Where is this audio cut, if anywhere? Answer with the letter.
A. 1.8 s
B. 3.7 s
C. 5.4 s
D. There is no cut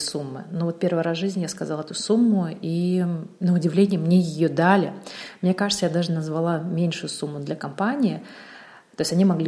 D